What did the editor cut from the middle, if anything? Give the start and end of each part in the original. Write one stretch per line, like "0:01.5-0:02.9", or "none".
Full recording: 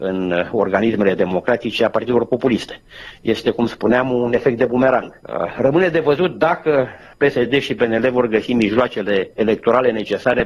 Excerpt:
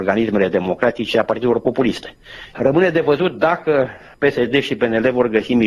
0:03.2-0:05.5